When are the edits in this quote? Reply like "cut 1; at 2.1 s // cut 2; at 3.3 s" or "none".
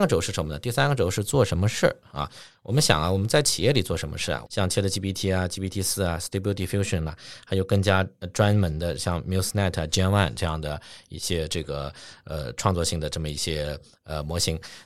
cut 1; at 4.5 s